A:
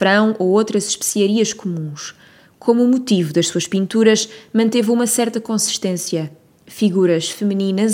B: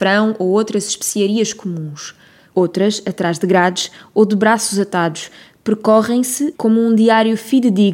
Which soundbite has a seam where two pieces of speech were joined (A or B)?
B